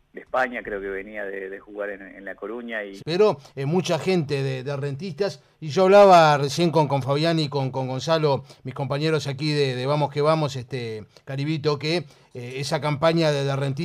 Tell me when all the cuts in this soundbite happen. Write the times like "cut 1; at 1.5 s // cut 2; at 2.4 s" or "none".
cut 1; at 3.0 s